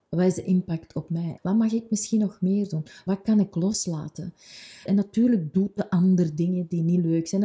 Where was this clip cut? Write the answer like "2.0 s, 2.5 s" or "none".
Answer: 1.4 s, 3.1 s, 4.9 s